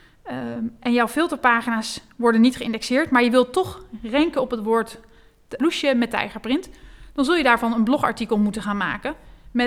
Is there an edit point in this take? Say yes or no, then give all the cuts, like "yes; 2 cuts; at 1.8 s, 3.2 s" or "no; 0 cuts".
yes; 1 cut; at 5.6 s